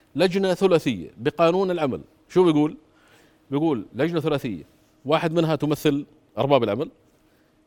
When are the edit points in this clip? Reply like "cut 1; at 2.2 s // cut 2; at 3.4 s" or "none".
none

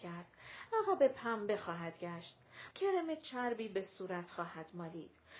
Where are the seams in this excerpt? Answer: cut 1; at 2.7 s

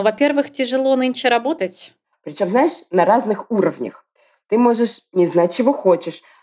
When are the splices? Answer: cut 1; at 2.1 s

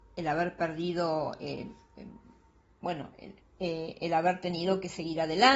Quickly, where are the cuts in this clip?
cut 1; at 3.4 s

